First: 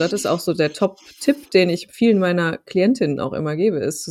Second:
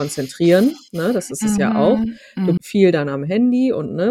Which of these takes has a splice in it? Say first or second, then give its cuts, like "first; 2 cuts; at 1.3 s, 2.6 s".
second; 1 cut; at 2.6 s